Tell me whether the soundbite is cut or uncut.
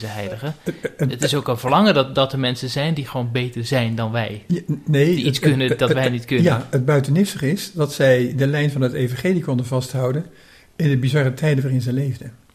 uncut